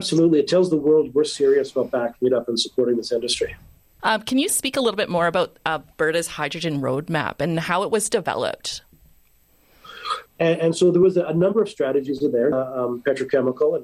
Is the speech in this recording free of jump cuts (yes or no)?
no